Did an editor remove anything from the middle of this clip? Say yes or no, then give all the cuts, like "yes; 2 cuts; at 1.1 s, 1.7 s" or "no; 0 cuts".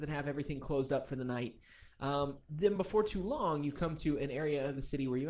no; 0 cuts